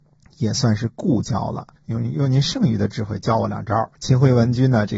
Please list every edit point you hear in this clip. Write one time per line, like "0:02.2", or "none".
0:01.7